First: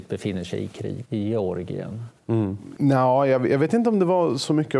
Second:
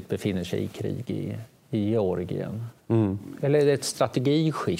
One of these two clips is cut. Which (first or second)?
first